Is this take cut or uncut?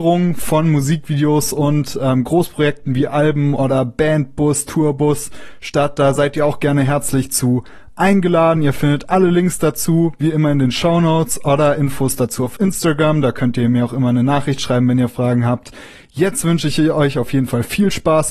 uncut